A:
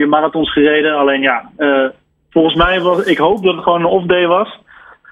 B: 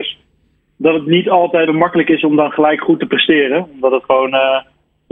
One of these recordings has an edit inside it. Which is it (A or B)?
B